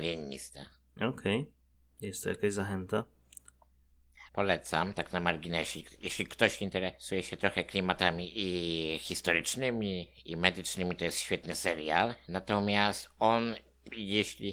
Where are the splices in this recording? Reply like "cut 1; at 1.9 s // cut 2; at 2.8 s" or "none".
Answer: cut 1; at 4.3 s